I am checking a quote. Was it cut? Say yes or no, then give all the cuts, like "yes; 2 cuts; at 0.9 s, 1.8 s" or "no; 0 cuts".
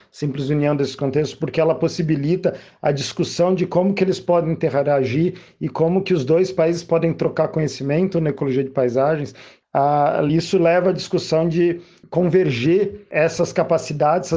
no; 0 cuts